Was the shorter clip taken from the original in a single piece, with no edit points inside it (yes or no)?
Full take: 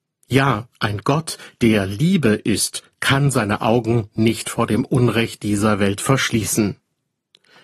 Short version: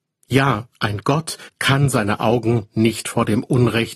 no